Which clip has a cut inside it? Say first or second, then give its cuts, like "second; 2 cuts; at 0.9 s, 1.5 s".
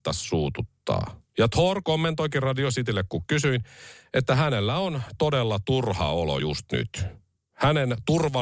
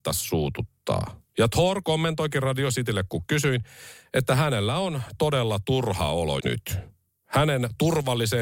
second; 1 cut; at 6.4 s